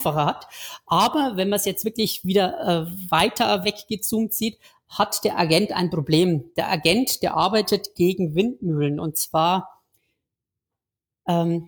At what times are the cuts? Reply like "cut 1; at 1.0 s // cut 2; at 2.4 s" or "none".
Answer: none